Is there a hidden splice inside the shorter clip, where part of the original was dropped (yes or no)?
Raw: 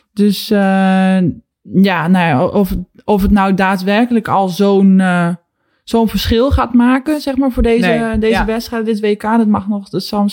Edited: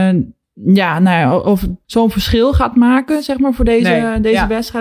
yes